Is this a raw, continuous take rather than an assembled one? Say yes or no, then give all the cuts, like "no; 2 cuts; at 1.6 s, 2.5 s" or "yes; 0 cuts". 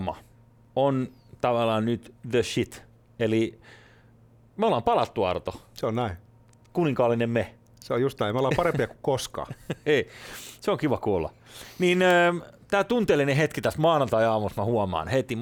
yes; 0 cuts